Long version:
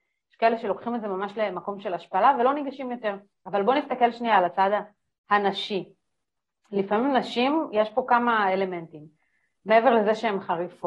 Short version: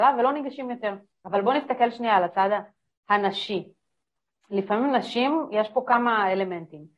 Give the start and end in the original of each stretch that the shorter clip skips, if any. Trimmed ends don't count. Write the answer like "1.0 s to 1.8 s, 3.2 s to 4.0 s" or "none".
none